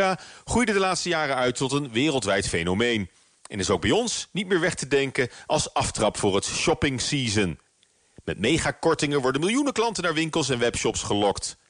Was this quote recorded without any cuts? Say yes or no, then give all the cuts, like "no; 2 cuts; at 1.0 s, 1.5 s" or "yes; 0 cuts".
yes; 0 cuts